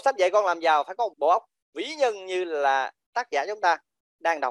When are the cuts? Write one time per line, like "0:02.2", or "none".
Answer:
0:01.1

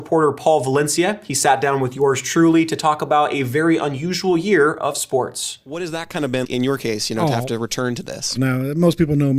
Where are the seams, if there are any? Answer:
0:06.4
0:08.4

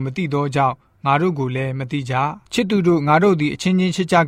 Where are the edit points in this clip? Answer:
0:02.4

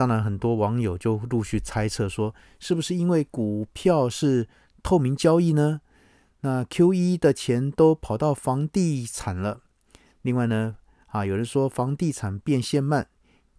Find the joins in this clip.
none

